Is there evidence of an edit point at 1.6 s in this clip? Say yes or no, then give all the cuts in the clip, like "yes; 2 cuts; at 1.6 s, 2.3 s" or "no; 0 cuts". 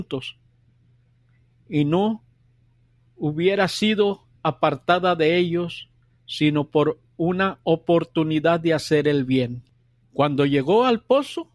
no; 1 cut; at 10.0 s